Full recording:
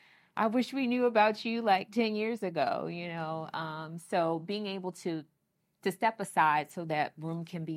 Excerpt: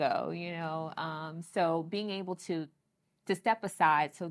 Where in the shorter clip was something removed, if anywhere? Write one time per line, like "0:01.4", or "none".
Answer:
none